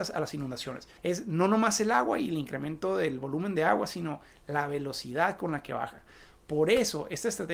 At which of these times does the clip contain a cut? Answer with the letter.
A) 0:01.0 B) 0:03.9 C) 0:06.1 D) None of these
A